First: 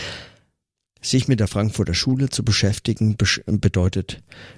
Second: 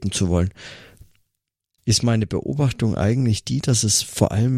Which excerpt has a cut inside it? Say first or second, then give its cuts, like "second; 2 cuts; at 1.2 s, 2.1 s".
first; 1 cut; at 0.9 s